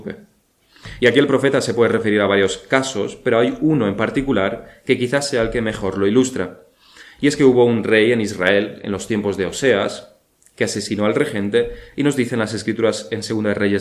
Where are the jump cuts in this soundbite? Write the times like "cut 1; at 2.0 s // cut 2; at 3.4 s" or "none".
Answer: none

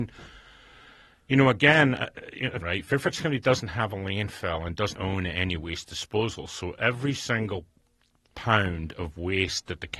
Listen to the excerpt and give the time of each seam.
cut 1; at 2.6 s // cut 2; at 5.0 s

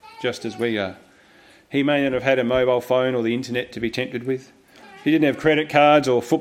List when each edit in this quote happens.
none

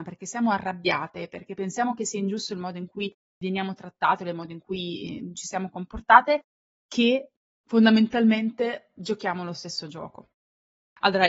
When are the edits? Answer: none

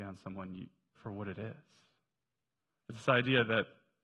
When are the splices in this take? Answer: cut 1; at 1.0 s

